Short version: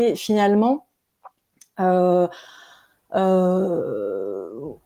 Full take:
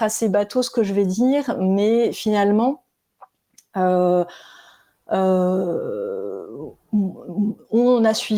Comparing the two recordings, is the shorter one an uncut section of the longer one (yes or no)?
yes